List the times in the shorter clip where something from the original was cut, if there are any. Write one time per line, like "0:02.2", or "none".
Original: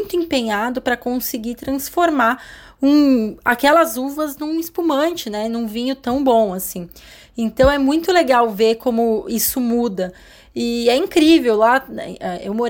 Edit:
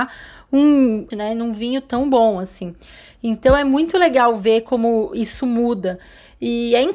0:01.1

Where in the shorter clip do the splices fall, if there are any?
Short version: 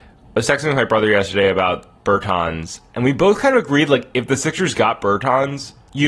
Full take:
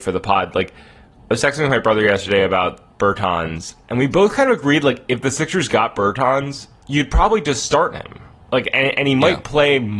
none

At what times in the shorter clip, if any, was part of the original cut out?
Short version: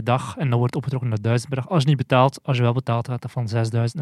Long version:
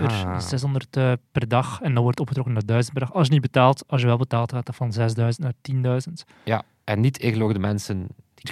none

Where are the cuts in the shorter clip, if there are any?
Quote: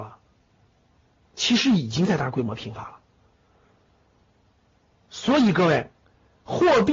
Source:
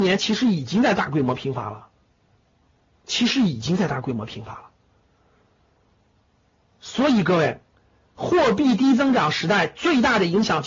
none

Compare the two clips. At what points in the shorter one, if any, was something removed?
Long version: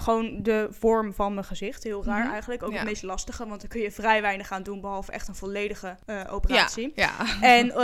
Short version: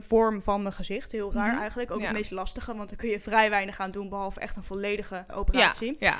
0:05.3

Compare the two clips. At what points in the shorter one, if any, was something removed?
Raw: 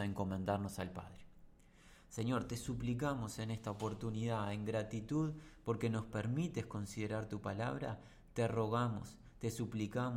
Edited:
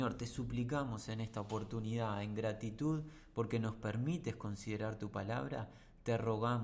none

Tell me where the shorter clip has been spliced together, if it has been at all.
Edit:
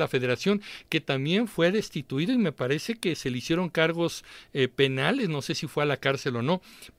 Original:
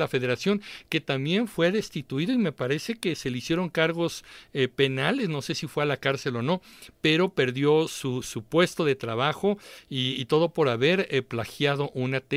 none

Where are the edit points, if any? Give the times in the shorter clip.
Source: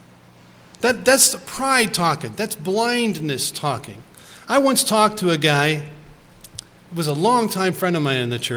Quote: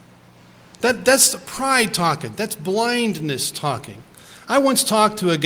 none

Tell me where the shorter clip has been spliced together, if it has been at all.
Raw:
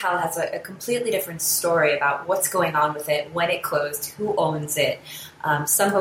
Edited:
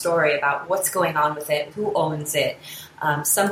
0:01.7

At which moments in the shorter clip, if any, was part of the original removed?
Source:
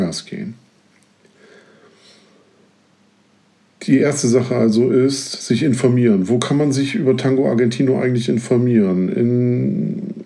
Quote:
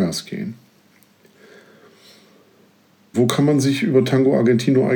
0:03.1

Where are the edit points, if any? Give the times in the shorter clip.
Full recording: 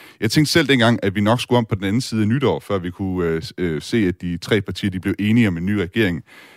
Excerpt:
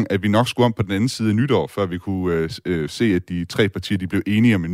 none

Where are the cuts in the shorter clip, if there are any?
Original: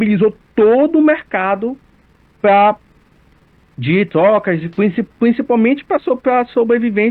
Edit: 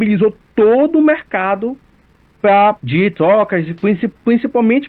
0:02.8

